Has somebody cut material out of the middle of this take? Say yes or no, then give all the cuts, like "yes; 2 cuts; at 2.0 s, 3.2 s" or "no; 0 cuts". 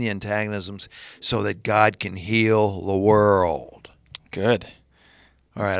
no; 0 cuts